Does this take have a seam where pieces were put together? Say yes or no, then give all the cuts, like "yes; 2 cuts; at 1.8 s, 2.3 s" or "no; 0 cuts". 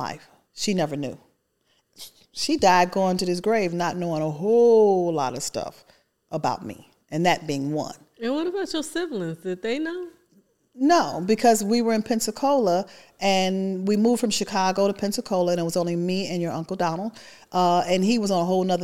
no; 0 cuts